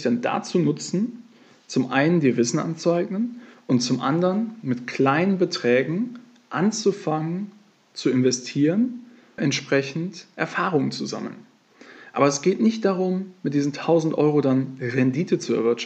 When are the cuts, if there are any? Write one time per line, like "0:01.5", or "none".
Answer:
0:09.4

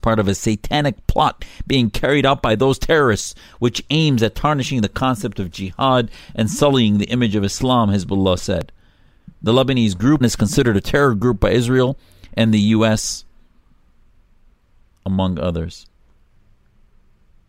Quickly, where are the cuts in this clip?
0:10.2

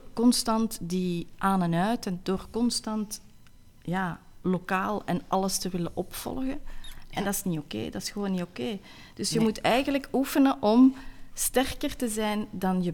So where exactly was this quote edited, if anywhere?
none

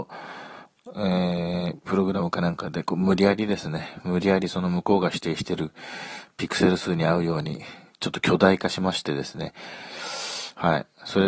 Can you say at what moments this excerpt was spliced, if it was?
none

